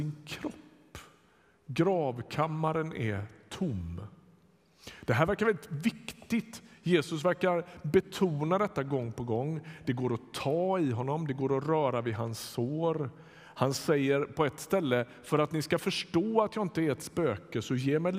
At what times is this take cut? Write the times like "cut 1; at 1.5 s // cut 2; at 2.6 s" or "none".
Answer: none